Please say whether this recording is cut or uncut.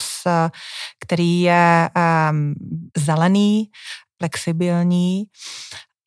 cut